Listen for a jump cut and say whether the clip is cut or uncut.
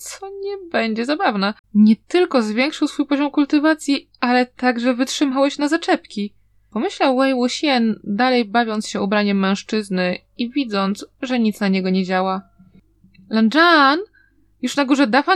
cut